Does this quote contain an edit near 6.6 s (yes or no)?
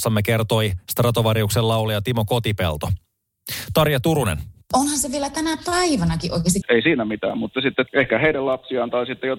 yes